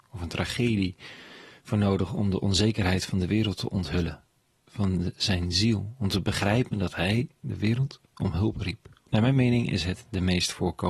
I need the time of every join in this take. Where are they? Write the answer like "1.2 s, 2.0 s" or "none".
9.1 s